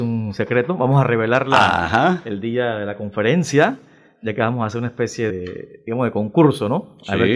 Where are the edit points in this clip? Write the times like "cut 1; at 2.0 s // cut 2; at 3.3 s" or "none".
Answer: cut 1; at 5.3 s